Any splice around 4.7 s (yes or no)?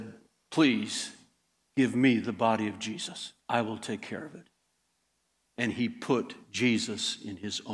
no